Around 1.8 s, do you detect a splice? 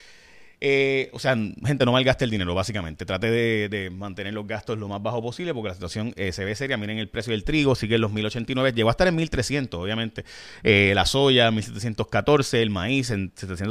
no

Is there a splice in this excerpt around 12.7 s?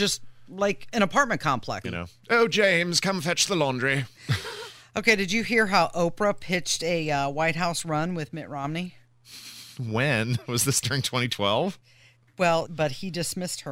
yes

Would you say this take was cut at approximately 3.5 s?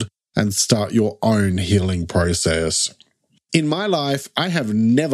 yes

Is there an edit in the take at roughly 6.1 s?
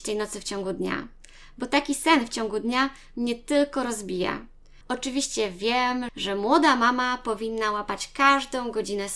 yes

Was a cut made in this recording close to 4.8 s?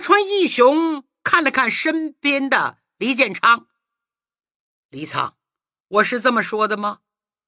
no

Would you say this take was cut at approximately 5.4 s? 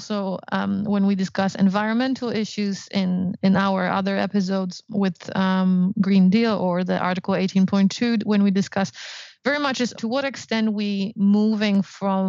no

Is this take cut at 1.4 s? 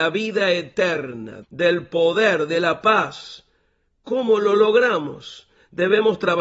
yes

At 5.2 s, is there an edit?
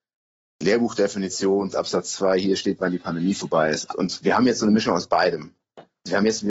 no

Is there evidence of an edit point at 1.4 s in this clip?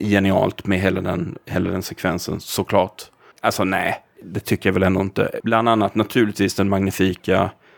no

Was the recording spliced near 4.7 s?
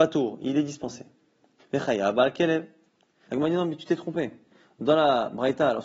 no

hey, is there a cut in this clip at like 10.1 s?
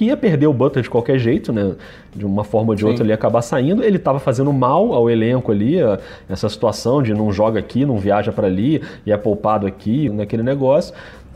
yes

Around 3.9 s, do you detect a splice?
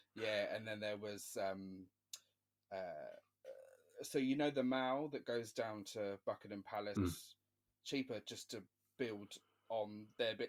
no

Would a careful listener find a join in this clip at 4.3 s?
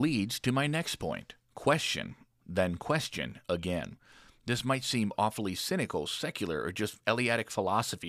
no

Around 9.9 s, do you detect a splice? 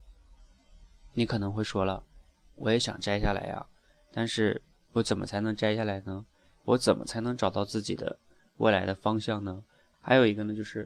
yes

